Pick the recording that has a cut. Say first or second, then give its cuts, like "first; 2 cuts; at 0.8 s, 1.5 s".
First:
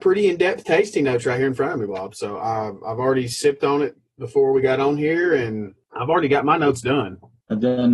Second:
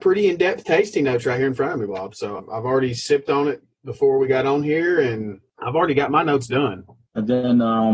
second; 1 cut; at 2.4 s